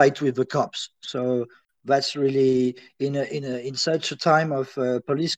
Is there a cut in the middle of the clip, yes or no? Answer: no